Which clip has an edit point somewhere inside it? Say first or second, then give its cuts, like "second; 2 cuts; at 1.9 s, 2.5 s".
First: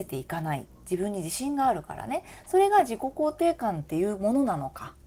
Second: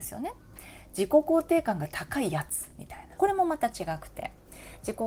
second; 1 cut; at 3.2 s